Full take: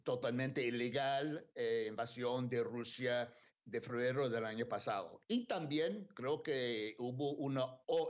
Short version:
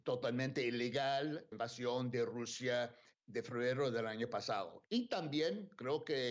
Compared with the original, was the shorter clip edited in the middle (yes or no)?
yes